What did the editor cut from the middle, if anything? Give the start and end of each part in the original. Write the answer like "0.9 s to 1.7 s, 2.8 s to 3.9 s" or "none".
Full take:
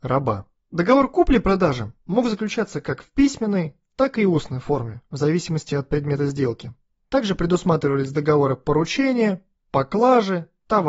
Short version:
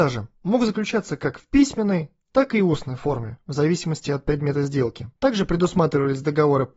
6.8 s to 7.1 s